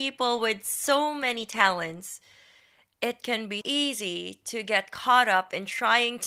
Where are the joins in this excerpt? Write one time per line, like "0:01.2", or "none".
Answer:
0:03.6